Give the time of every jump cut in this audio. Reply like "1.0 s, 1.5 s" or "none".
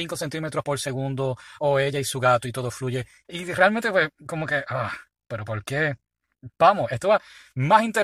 3.2 s